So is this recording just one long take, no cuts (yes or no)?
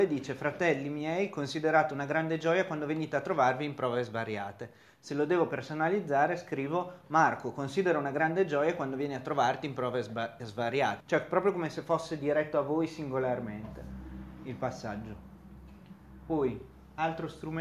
no